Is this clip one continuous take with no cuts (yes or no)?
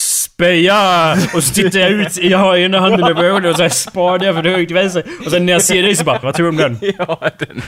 no